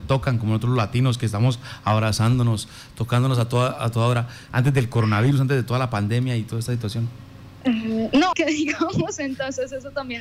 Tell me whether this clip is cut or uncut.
cut